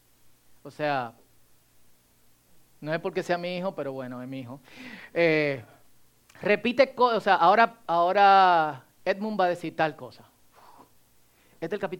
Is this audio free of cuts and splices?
yes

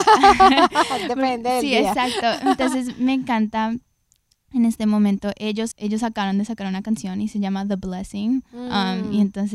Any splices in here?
yes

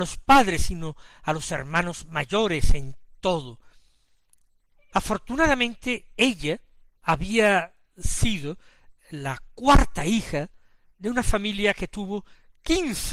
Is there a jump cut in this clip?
yes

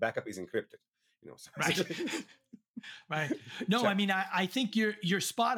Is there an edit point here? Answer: no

